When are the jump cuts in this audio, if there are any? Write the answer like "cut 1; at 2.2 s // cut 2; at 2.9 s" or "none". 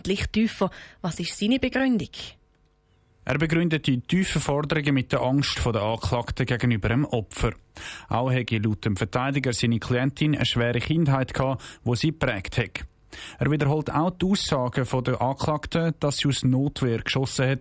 none